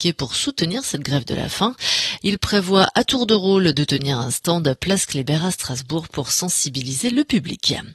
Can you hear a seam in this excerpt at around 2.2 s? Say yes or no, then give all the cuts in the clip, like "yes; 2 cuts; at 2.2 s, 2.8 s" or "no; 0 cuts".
yes; 1 cut; at 2.2 s